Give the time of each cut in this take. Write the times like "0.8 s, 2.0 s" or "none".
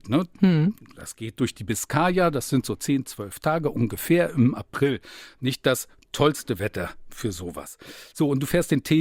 none